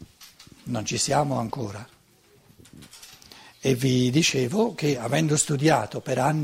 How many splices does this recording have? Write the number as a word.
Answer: zero